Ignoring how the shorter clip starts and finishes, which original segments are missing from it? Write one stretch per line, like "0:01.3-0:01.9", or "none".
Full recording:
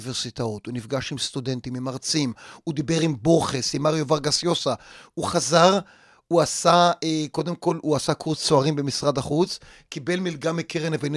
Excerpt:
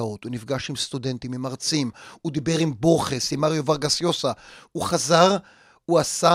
none